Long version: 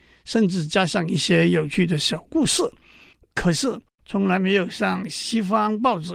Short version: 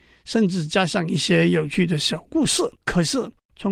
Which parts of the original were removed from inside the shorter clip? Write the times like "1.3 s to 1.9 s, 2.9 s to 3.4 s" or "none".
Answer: 2.7 s to 3.2 s